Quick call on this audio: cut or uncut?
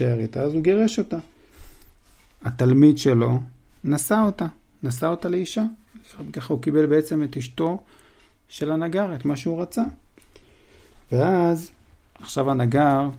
uncut